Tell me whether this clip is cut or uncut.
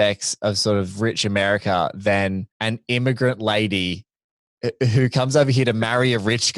cut